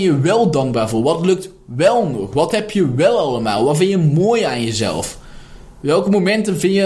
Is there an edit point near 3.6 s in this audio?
no; 0 cuts

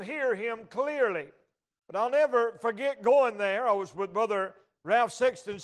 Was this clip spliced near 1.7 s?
no; 0 cuts

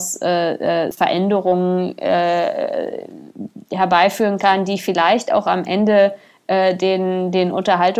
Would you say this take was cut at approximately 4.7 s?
no; 1 cut; at 0.9 s

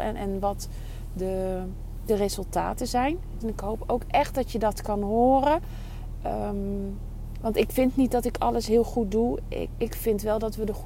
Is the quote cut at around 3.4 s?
yes; 1 cut; at 3.4 s

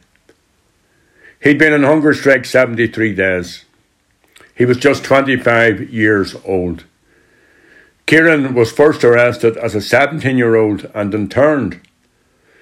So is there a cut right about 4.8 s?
no; 0 cuts

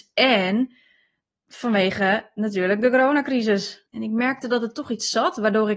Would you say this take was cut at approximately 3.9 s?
yes; 1 cut; at 3.9 s

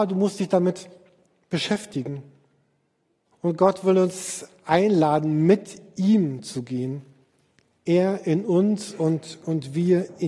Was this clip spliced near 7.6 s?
no; 1 cut; at 3.3 s

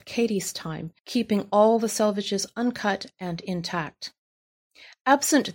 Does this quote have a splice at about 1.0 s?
yes; 1 cut; at 1.0 s

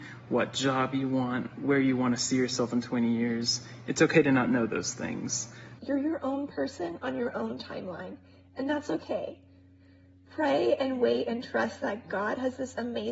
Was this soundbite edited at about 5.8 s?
yes; 1 cut; at 5.8 s

